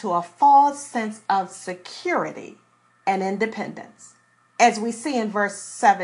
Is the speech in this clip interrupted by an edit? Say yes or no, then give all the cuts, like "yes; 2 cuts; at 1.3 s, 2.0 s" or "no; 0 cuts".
yes; 1 cut; at 4.4 s